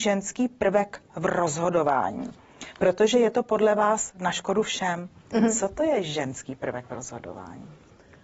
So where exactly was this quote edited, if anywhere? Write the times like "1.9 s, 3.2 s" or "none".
none